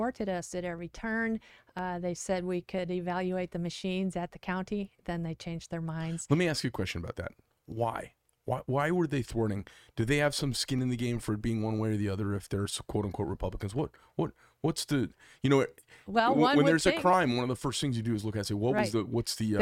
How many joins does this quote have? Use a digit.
0